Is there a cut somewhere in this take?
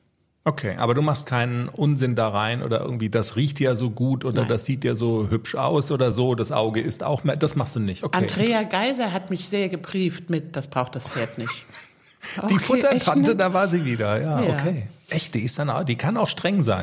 no; 0 cuts

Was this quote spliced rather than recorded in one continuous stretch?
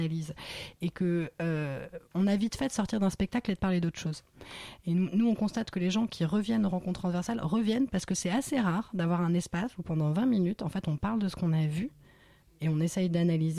no; 0 cuts

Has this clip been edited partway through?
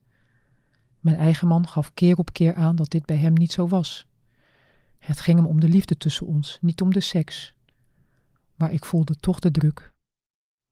no; 0 cuts

